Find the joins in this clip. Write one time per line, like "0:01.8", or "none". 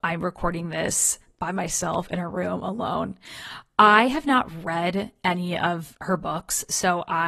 none